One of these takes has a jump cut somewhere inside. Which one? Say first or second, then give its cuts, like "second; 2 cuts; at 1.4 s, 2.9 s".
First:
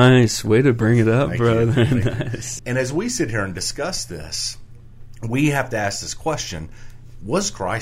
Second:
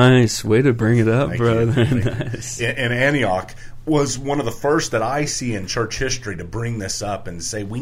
first; 1 cut; at 2.6 s